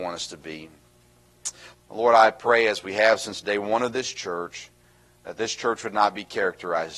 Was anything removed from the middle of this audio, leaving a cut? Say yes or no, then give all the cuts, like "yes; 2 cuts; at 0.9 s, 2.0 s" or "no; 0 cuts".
yes; 1 cut; at 1.7 s